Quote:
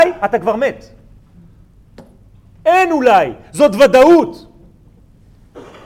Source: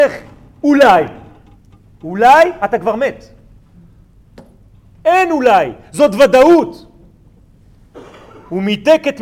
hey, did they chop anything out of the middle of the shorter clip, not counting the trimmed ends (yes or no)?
no